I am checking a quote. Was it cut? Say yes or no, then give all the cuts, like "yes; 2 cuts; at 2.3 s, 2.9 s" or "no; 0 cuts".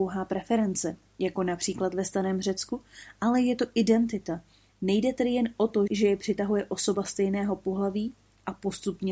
yes; 2 cuts; at 4.7 s, 5.9 s